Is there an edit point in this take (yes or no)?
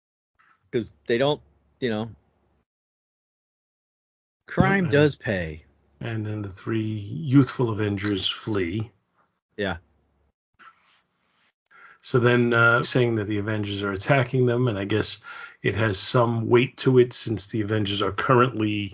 yes